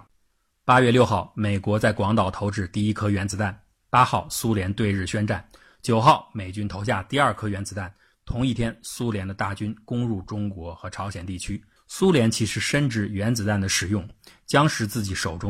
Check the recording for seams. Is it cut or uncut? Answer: cut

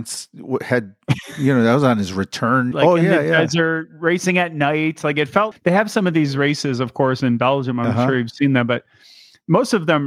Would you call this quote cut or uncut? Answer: cut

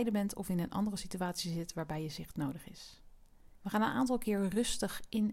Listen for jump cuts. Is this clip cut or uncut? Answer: cut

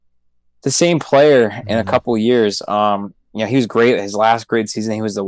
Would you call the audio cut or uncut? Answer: uncut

